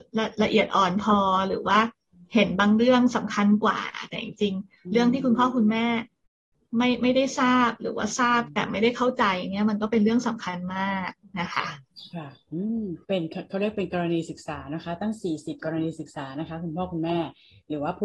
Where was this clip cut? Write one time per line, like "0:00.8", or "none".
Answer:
0:13.0